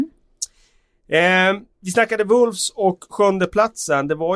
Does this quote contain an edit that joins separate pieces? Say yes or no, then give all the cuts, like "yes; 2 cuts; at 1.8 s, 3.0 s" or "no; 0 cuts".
yes; 1 cut; at 1.7 s